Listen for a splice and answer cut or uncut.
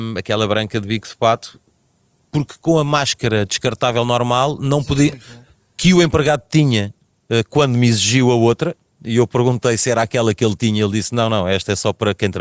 uncut